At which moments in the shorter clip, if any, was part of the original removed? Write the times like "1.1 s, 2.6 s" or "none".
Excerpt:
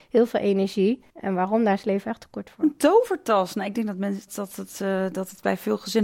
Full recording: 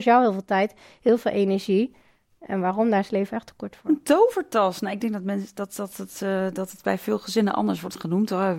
1.1 s, 4.3 s